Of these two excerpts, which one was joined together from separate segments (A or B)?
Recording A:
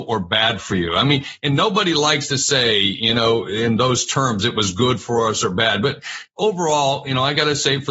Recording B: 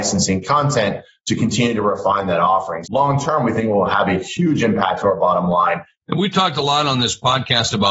B